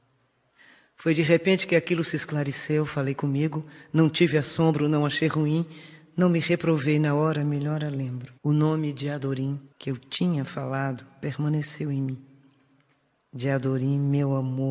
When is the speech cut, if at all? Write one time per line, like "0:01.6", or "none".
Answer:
0:08.4
0:09.7
0:13.2